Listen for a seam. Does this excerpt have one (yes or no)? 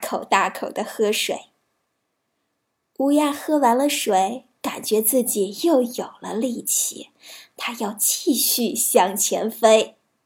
no